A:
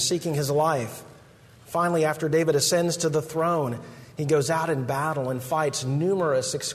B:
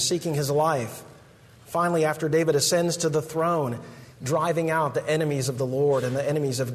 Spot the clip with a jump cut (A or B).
B